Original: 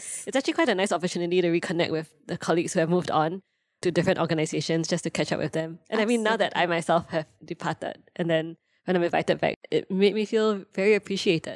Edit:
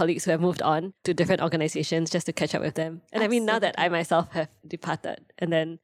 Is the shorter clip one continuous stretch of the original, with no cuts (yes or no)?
no